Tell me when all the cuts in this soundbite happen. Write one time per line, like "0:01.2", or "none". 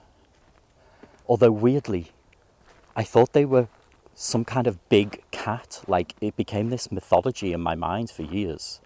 0:01.2